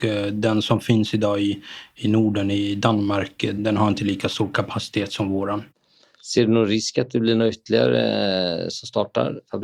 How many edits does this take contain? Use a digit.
0